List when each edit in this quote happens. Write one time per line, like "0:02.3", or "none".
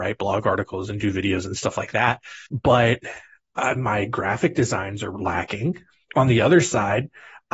0:02.5